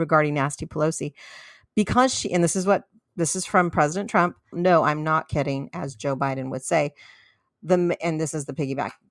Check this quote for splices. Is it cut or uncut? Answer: cut